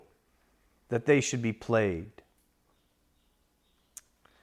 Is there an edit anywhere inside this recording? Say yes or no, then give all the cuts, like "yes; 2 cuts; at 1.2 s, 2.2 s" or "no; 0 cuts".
no; 0 cuts